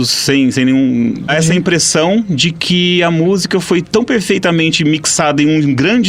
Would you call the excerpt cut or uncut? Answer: cut